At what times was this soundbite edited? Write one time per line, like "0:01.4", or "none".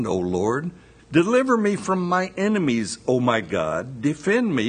0:01.0